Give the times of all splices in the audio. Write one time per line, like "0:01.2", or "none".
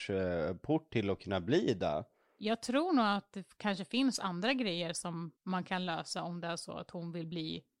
0:05.4